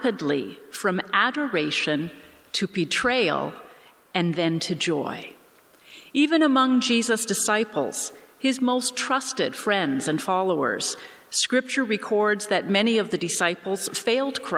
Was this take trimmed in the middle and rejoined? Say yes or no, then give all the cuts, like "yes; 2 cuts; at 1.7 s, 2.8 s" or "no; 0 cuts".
no; 0 cuts